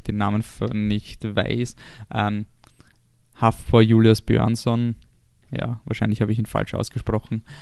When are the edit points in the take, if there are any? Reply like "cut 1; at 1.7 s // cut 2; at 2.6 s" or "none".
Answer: none